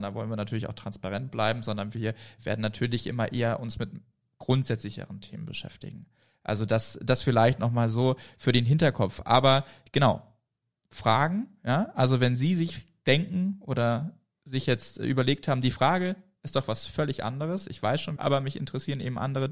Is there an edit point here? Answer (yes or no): yes